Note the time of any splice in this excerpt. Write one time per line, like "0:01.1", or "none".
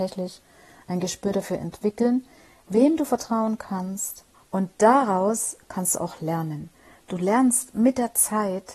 0:04.3